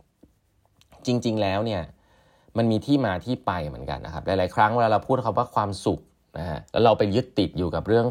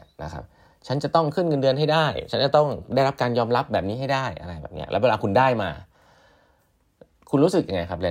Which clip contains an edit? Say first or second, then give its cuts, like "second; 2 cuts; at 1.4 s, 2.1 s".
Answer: first; 2 cuts; at 4.0 s, 6.7 s